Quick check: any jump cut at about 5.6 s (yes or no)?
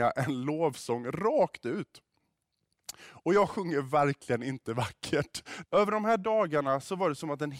yes